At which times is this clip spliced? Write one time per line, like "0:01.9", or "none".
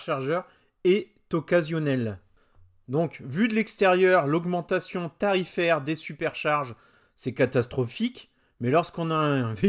none